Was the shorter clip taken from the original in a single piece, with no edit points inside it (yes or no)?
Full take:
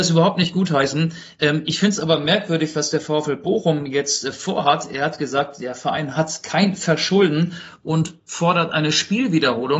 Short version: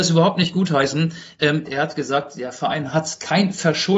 no